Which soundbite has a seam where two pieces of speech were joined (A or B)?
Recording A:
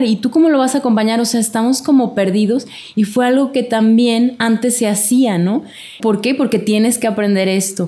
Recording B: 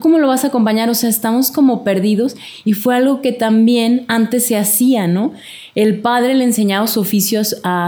A